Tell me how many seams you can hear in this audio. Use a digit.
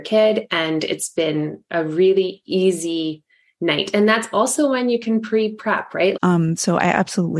1